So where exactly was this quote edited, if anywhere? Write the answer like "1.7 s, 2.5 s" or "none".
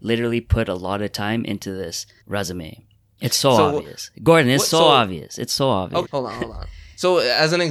6.0 s